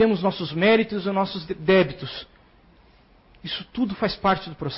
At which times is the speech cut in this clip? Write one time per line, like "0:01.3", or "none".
none